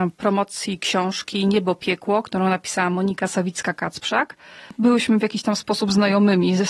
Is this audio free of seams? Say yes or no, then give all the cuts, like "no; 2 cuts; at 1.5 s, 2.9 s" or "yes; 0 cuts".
yes; 0 cuts